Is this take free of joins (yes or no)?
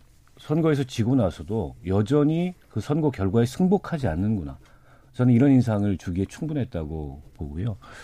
yes